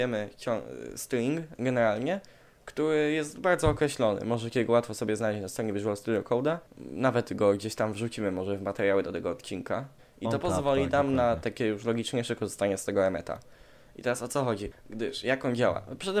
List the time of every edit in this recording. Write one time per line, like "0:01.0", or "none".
0:06.7
0:10.0
0:14.7